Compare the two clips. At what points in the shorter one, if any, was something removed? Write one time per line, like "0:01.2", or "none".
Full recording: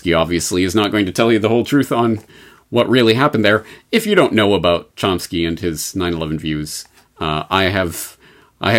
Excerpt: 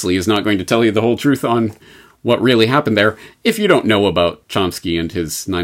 none